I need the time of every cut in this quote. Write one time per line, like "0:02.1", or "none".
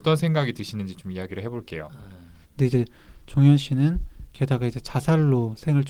0:02.4